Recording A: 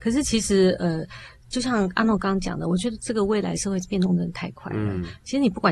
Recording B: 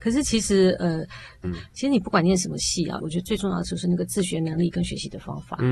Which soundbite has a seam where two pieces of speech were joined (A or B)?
B